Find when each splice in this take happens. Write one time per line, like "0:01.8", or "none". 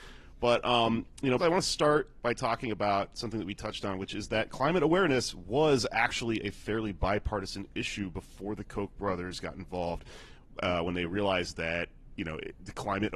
0:01.4